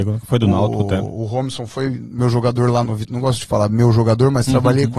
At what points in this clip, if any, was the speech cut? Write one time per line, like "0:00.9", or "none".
0:02.9